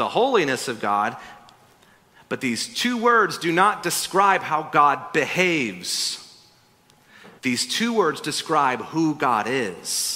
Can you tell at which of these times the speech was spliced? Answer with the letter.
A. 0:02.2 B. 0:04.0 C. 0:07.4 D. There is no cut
C